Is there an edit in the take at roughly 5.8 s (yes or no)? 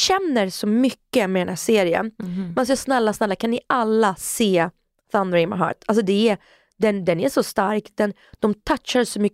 no